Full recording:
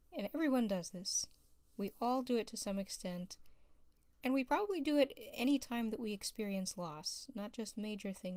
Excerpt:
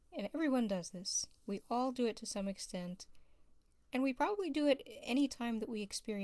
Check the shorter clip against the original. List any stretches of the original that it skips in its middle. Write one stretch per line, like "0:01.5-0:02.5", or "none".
0:01.4-0:01.7